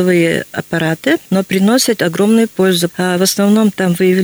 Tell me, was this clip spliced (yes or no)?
yes